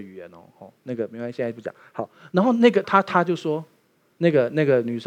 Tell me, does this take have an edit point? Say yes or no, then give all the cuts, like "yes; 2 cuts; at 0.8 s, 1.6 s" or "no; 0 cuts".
yes; 1 cut; at 2.8 s